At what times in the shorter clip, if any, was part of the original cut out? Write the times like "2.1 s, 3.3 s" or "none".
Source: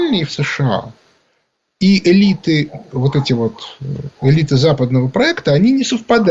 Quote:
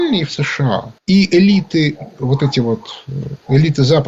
1.0 s